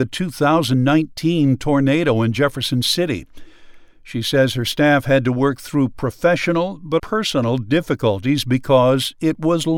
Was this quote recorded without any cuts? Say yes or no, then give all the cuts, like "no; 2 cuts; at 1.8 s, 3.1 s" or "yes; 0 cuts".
no; 1 cut; at 7.0 s